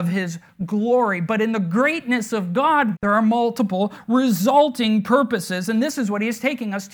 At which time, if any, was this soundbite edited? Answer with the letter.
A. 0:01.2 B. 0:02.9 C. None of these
B